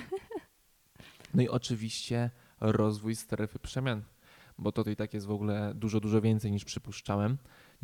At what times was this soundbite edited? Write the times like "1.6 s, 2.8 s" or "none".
4.8 s